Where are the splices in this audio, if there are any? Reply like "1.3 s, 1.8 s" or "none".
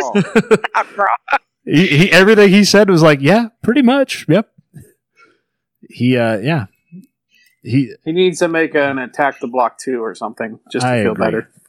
none